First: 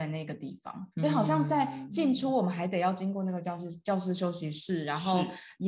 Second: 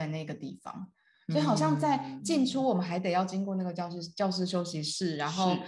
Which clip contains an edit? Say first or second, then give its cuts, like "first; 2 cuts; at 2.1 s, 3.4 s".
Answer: first; 1 cut; at 0.9 s